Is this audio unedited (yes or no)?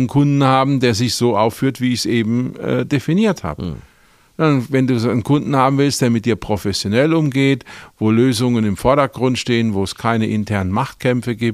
yes